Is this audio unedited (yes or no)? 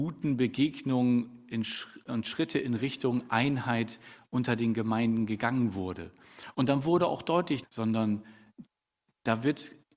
no